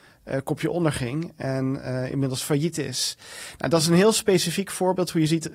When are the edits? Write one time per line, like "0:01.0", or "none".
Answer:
none